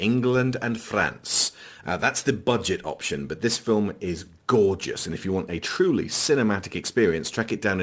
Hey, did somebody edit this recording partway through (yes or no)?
yes